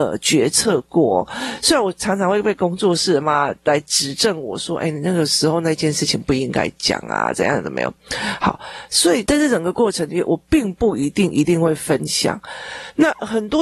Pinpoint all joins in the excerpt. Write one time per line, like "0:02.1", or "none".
0:03.2